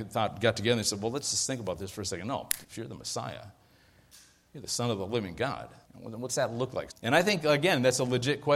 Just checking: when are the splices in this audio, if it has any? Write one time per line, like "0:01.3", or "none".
0:02.6
0:05.8
0:06.9

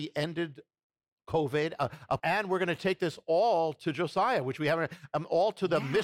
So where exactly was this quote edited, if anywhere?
0:02.2

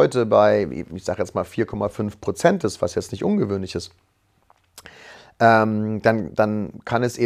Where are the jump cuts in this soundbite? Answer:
none

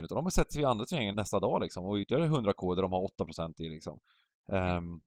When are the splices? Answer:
0:01.1

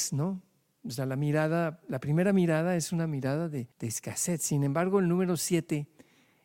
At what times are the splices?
0:03.7

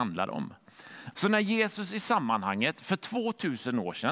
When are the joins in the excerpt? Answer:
0:01.1

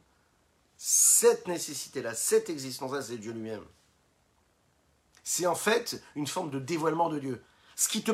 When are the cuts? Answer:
none

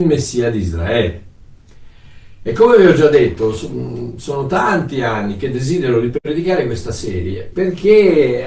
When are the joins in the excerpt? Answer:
0:07.5

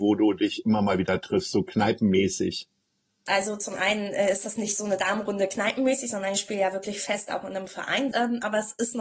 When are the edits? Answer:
0:03.3
0:08.1

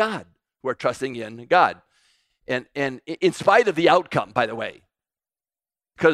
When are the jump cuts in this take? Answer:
none

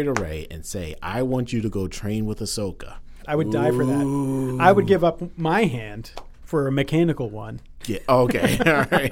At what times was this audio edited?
0:03.2

